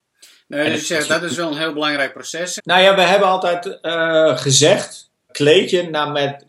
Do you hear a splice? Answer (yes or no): yes